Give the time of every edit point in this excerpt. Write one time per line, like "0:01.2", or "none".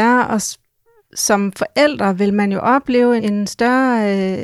0:03.2